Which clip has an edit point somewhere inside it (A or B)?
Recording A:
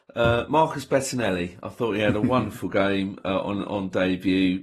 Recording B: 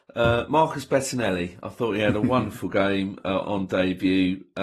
B